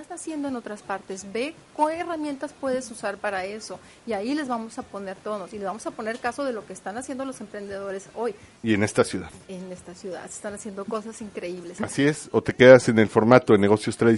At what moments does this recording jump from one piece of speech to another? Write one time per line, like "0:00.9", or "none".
0:08.6
0:11.8